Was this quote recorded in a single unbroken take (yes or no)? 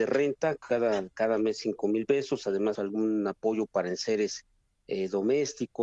no